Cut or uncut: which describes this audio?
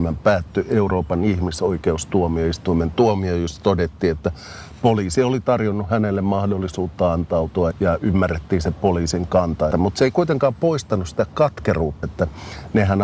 cut